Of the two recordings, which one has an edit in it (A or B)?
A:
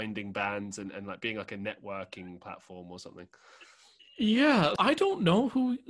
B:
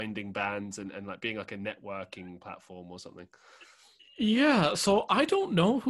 A